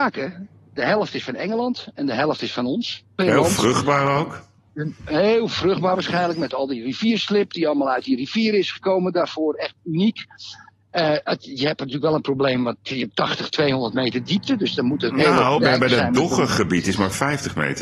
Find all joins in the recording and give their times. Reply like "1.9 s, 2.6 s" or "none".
3.2 s, 15.6 s